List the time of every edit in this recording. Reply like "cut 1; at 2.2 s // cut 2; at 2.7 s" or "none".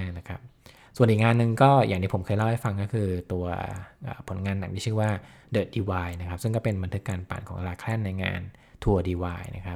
none